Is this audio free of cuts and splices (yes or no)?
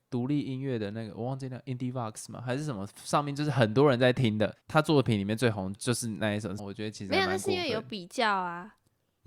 no